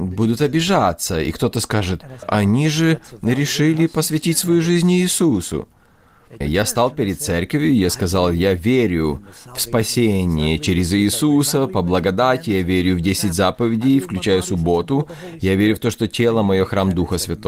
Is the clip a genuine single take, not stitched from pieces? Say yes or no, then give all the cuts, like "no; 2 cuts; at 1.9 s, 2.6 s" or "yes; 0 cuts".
no; 2 cuts; at 2.2 s, 6.4 s